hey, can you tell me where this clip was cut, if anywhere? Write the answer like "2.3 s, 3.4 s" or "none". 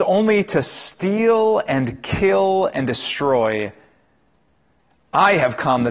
none